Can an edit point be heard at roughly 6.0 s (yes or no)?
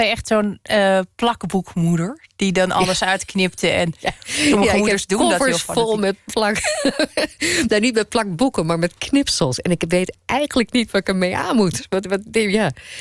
no